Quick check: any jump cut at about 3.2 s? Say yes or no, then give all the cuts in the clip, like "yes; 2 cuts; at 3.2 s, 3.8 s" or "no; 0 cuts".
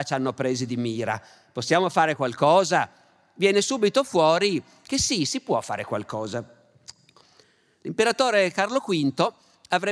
no; 0 cuts